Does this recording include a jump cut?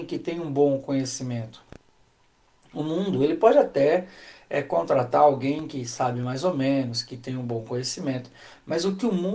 no; 0 cuts

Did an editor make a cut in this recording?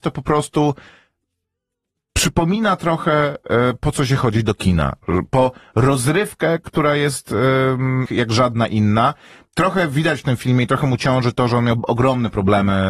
yes; 1 cut; at 8.1 s

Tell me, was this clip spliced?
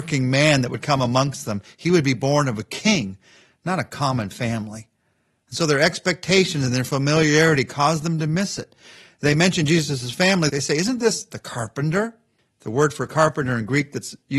yes; 1 cut; at 10.5 s

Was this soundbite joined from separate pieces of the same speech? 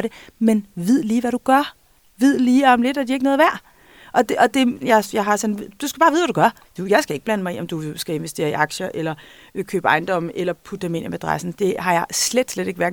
yes; 1 cut; at 4.8 s

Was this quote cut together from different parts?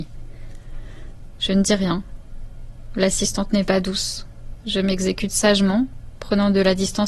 yes; 1 cut; at 1.4 s

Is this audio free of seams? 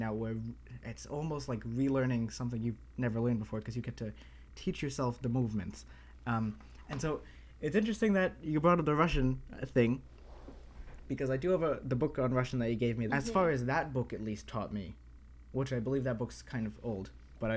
no; 1 cut; at 13.1 s

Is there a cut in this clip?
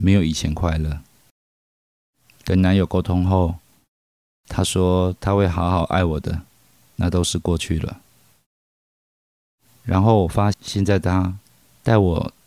yes; 1 cut; at 10.5 s

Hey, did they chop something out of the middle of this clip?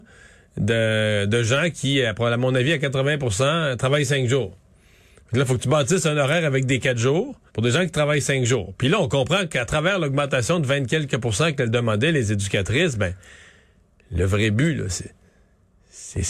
yes; 1 cut; at 7.5 s

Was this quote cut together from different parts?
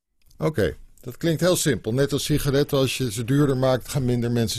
no; 0 cuts

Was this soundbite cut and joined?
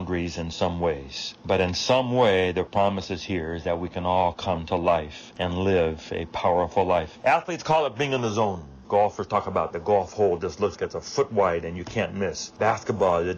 yes; 2 cuts; at 8.8 s, 10.8 s

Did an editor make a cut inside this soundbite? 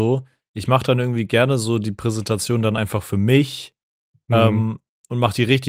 no; 0 cuts

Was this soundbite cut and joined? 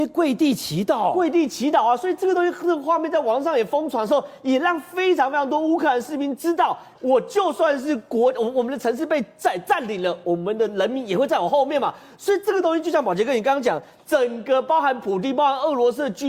yes; 1 cut; at 6.9 s

